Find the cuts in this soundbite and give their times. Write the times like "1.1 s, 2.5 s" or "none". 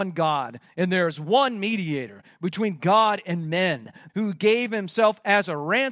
4.1 s